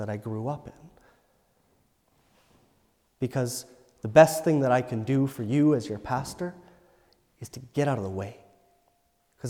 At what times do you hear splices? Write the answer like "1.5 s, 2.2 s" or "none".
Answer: 3.1 s